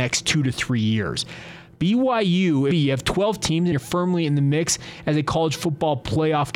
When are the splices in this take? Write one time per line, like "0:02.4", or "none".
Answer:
0:02.7
0:03.7